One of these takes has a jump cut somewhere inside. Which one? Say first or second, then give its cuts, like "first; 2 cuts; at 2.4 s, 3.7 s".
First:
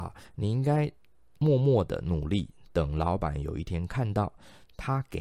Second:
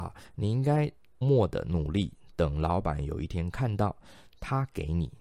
second; 1 cut; at 1.2 s